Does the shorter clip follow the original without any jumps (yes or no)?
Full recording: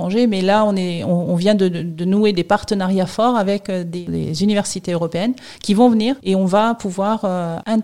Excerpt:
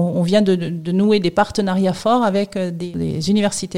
yes